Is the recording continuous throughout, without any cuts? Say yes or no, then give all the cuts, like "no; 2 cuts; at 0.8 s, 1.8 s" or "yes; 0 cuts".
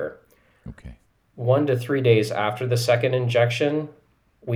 yes; 0 cuts